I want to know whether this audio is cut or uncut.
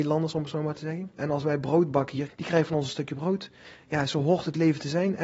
cut